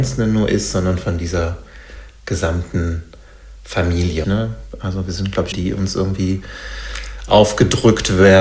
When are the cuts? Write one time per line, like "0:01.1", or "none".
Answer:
0:04.2
0:05.5